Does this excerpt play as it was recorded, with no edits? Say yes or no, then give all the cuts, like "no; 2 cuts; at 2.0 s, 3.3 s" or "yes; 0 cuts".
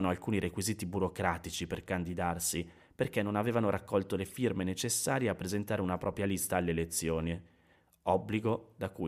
yes; 0 cuts